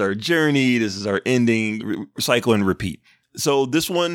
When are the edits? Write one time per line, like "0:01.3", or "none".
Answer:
0:01.8

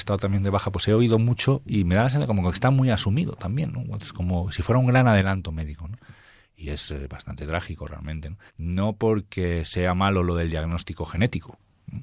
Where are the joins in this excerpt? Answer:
0:08.5

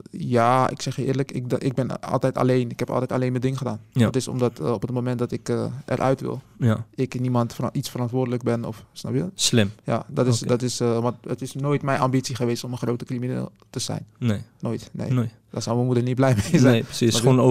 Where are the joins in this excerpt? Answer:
none

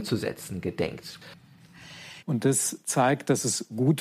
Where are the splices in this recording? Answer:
0:02.2

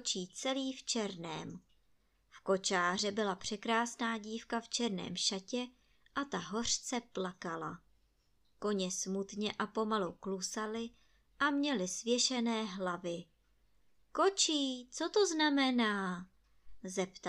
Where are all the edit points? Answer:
none

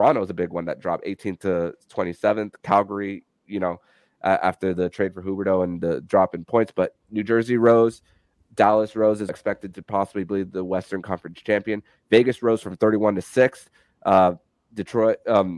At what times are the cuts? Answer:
0:09.3

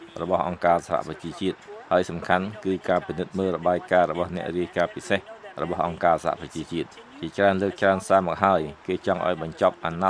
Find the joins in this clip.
none

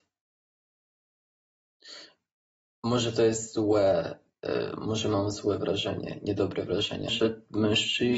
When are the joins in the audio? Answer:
0:07.1

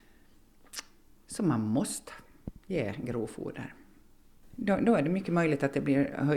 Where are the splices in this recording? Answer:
none

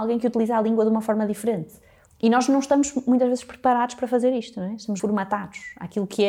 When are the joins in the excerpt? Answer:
0:02.1
0:05.0

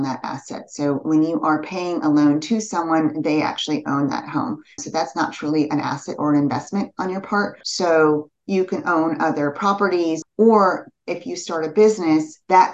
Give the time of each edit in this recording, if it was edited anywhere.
0:04.8
0:07.6
0:10.2

